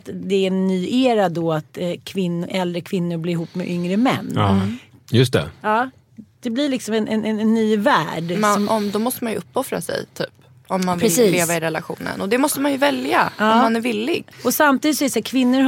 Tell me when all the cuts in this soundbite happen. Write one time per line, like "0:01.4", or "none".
0:14.3